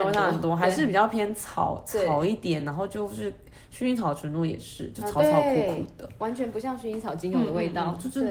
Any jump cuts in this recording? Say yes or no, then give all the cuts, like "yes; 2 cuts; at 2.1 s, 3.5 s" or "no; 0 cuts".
no; 0 cuts